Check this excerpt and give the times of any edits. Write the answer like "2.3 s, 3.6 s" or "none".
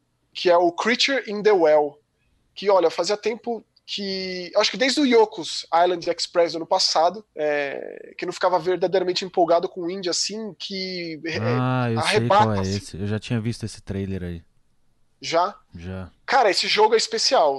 7.3 s